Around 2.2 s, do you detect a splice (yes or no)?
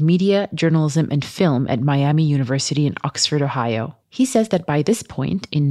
no